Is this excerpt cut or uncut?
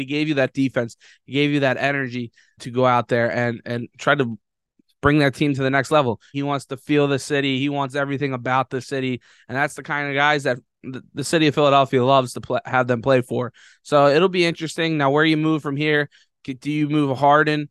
cut